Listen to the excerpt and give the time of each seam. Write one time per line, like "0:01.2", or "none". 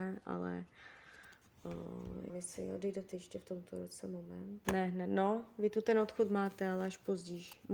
0:02.3
0:04.6